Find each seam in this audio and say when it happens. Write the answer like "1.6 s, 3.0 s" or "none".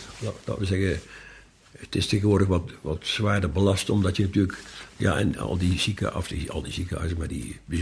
none